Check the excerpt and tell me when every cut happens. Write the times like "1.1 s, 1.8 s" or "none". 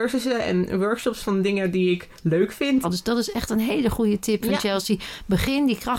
2.8 s